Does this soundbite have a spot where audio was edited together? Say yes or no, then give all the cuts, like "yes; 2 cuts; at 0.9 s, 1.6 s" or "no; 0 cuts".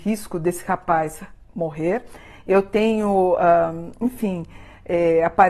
no; 0 cuts